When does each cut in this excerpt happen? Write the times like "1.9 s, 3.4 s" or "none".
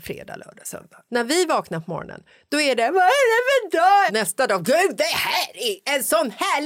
1.1 s, 4.1 s